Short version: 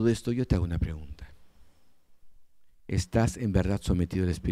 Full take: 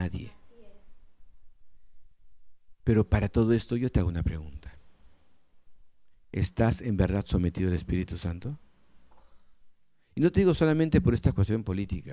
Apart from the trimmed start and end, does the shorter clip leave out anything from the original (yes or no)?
no